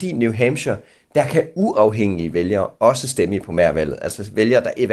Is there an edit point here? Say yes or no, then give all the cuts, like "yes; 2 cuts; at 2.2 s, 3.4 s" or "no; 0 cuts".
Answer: no; 0 cuts